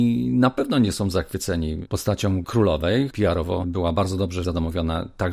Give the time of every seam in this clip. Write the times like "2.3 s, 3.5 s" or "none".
3.1 s, 4.4 s